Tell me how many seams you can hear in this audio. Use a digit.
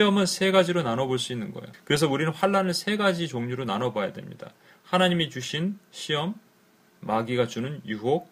1